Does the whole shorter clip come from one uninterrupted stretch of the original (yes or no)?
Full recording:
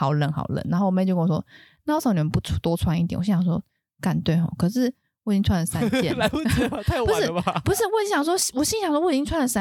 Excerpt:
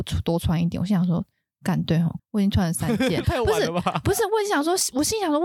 no